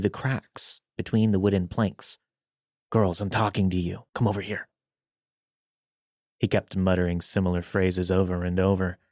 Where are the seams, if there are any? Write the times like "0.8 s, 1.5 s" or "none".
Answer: 2.8 s, 4.1 s